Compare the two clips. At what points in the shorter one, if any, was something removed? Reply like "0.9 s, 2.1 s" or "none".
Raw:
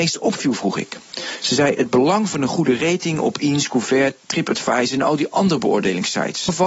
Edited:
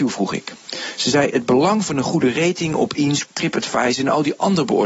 3.2 s